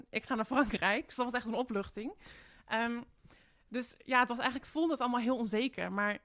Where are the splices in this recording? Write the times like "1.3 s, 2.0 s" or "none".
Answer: none